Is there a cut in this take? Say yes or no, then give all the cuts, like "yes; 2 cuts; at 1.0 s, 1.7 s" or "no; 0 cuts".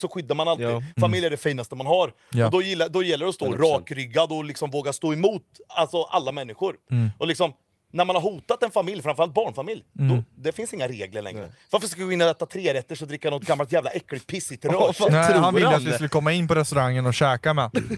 no; 0 cuts